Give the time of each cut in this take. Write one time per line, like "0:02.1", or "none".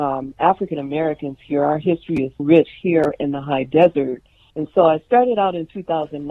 0:02.4
0:04.5